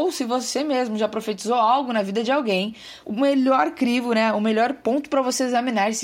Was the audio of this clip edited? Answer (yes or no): yes